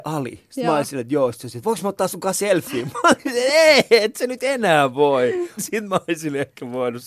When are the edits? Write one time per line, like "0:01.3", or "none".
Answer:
0:05.6

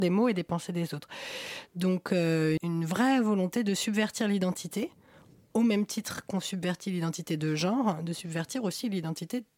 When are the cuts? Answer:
0:02.6

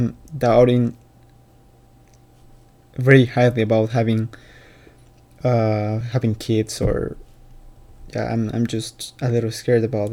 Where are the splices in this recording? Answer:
none

